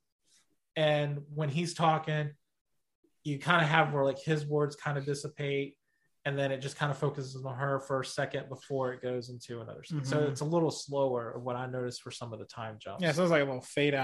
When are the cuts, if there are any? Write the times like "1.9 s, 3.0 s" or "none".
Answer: none